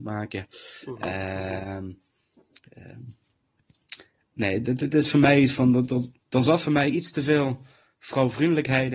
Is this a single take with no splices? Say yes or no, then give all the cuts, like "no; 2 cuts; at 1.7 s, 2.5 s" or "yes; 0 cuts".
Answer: yes; 0 cuts